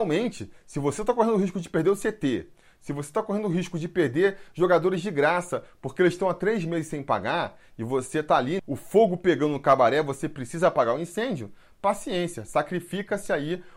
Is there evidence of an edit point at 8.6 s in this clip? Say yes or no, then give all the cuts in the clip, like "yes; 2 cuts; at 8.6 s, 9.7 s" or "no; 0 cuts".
yes; 1 cut; at 8.6 s